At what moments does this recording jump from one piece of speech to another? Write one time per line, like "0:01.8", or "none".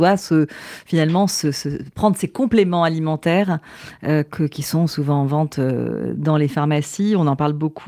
none